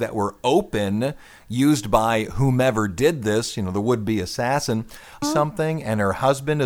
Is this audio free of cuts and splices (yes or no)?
no